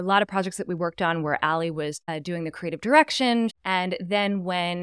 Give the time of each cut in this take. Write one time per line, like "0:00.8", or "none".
0:03.5